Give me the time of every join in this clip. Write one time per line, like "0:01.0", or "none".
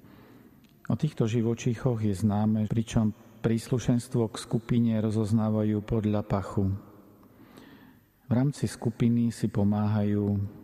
0:02.6

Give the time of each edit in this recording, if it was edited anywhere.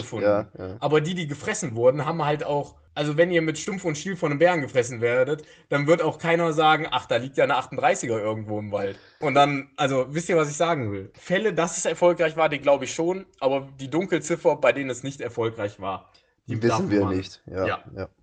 none

